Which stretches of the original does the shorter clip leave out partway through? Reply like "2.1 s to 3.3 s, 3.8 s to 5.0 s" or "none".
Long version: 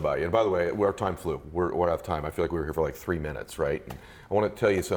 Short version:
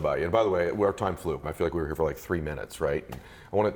1.4 s to 2.2 s

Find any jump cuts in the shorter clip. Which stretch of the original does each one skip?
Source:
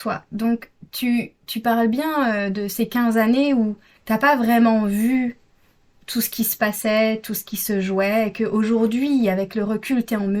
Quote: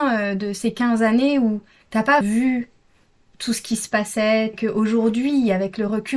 4.4 s to 4.9 s, 7.2 s to 8.3 s

